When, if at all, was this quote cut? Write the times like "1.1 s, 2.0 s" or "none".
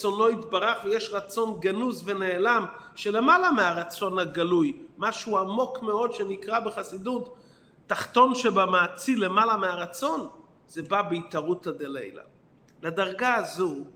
none